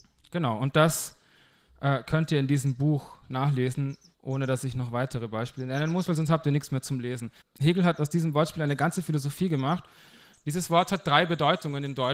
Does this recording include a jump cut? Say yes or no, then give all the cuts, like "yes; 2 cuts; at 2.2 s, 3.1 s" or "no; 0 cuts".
yes; 2 cuts; at 7.4 s, 10.3 s